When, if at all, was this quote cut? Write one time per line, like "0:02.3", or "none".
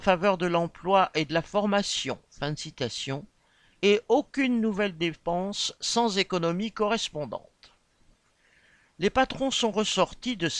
none